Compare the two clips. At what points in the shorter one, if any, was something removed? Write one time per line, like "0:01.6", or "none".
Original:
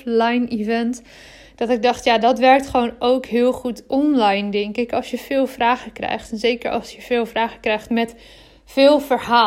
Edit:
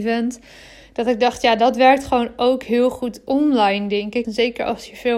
0:04.2